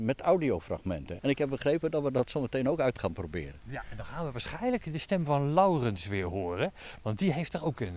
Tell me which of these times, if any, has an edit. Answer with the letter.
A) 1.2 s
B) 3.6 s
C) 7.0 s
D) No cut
A